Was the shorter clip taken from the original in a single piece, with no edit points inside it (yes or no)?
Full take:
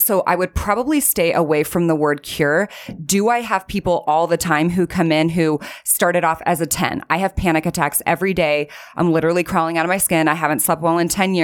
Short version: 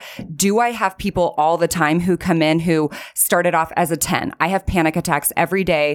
yes